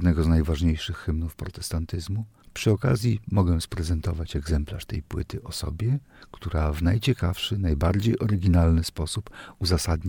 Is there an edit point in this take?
yes; 1 cut; at 2.4 s

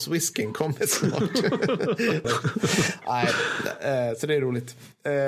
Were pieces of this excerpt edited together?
yes; 1 cut; at 2.2 s

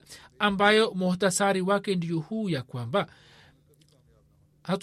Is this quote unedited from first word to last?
yes; 0 cuts

